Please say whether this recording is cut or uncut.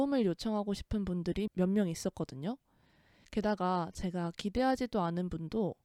cut